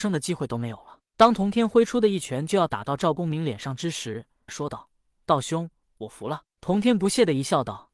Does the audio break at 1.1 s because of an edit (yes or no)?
no